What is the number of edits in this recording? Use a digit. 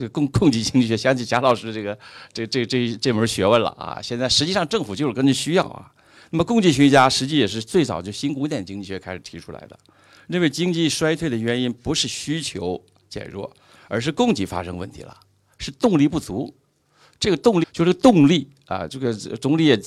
1